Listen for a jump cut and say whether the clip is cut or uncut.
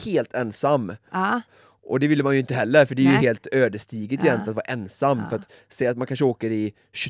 uncut